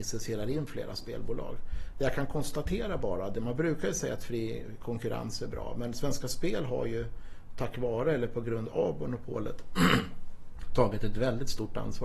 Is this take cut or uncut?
uncut